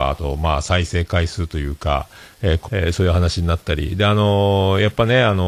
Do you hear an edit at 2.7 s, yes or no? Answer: yes